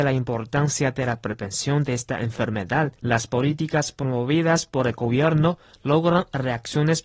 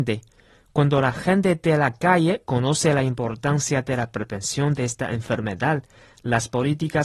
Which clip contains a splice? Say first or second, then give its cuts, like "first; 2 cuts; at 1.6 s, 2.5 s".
first; 1 cut; at 3.0 s